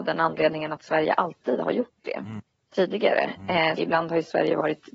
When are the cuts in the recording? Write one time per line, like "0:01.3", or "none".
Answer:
0:03.8